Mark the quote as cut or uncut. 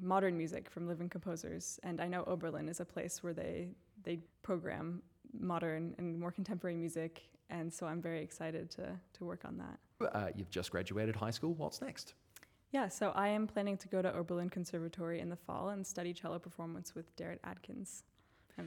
cut